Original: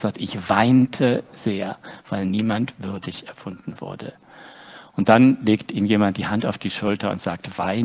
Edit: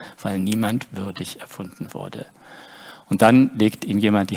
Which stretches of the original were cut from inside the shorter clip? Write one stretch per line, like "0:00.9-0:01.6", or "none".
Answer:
none